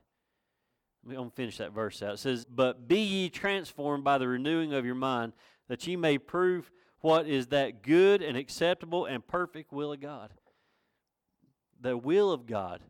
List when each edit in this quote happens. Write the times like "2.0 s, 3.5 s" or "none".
2.4 s